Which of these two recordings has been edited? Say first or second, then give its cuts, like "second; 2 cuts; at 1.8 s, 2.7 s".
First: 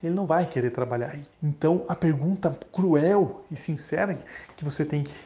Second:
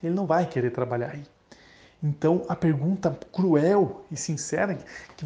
first; 1 cut; at 1.3 s